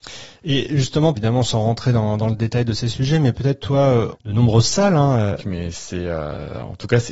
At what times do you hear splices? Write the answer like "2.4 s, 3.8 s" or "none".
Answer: 1.1 s, 4.1 s, 5.4 s

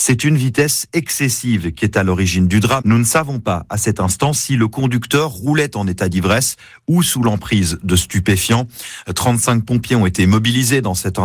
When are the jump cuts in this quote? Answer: 2.8 s

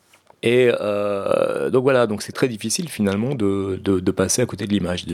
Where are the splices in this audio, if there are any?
2.3 s

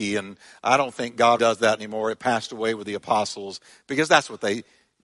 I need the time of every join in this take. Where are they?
1.4 s

